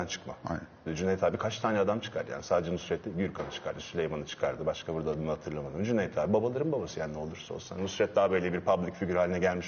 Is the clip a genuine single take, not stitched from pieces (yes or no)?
yes